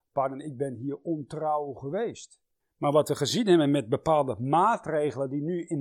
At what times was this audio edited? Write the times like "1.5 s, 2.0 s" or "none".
2.6 s